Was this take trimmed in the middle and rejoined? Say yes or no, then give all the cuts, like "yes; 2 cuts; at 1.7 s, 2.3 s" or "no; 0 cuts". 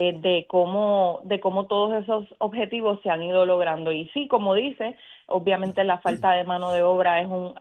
no; 0 cuts